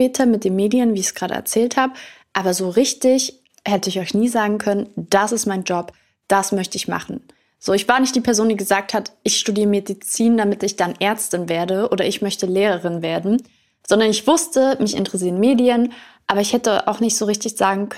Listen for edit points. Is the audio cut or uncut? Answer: uncut